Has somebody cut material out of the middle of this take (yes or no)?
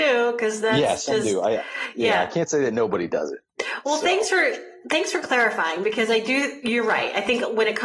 no